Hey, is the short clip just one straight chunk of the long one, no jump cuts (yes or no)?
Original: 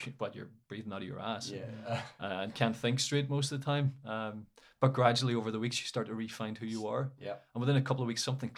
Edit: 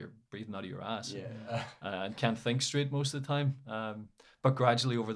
yes